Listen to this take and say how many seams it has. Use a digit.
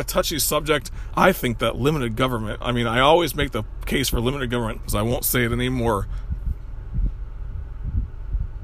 2